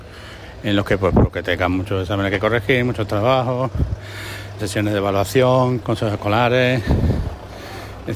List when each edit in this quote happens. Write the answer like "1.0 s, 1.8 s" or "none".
4.6 s, 5.8 s